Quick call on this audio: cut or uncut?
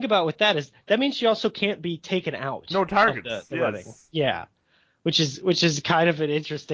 uncut